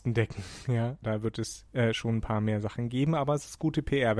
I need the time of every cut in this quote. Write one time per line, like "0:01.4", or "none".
0:01.0